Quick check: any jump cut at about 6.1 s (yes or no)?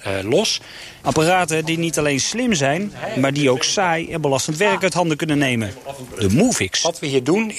no